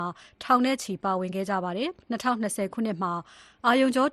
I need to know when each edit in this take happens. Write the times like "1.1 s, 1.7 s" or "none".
2.0 s